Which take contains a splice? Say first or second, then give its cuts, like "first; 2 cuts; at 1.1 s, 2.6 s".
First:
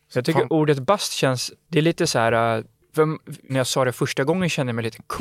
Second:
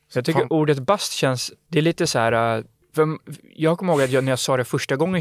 first; 1 cut; at 3.5 s